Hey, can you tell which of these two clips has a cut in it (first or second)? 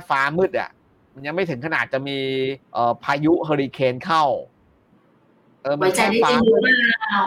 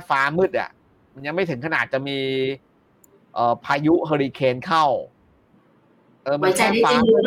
first